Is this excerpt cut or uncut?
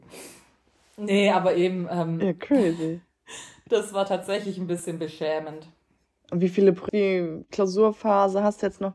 cut